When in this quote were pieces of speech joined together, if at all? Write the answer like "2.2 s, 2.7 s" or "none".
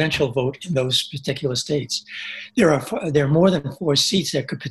none